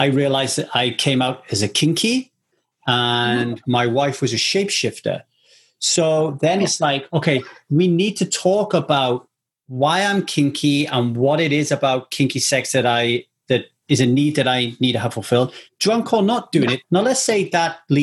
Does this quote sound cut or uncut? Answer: cut